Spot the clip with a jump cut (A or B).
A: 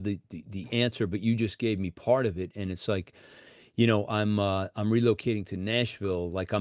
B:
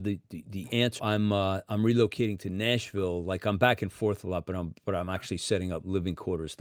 B